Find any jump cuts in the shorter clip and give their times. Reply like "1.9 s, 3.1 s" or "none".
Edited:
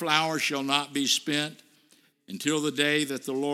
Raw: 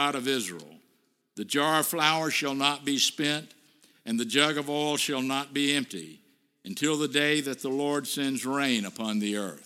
2.1 s